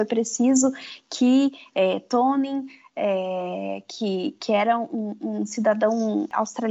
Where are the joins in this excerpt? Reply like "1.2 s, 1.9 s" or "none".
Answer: none

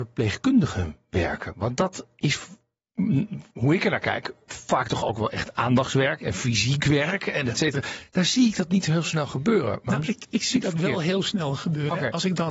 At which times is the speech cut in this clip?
none

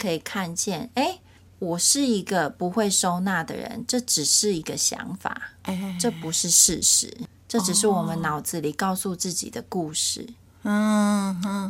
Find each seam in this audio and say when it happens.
none

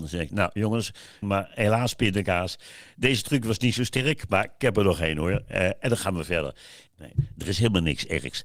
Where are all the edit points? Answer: 1.2 s, 6.9 s

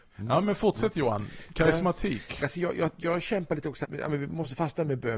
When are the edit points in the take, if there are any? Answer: 2.4 s, 3.8 s

